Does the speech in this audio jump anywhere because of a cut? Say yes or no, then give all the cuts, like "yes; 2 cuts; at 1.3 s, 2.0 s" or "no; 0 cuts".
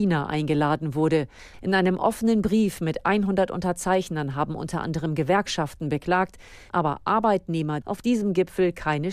yes; 3 cuts; at 1.5 s, 6.7 s, 7.8 s